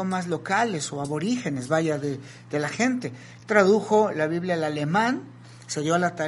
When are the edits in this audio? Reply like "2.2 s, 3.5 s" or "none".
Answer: none